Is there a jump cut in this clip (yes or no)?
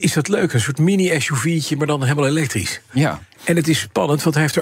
no